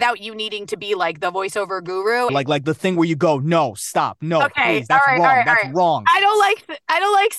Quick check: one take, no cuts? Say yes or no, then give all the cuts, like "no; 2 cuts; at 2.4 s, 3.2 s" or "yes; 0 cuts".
no; 1 cut; at 2.3 s